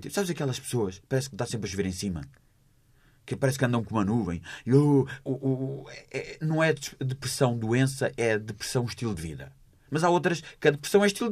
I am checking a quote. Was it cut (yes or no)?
yes